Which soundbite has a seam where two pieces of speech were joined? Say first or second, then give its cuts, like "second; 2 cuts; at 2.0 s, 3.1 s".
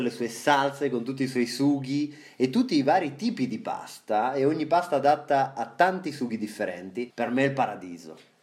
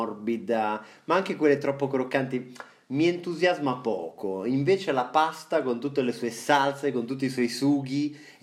first; 1 cut; at 7.1 s